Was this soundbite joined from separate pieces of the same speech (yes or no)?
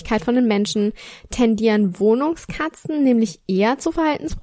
no